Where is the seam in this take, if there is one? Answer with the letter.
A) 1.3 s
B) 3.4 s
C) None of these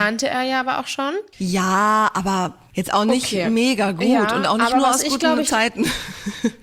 C